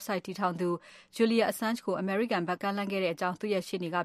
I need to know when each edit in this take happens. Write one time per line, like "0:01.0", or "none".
0:02.6